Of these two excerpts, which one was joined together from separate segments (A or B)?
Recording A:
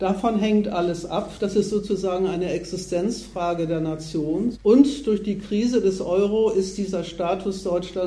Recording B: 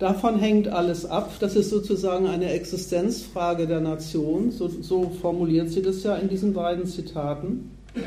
A